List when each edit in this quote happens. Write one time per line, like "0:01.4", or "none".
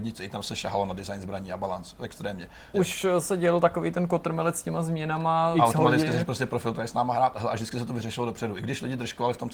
0:02.7
0:05.5
0:06.7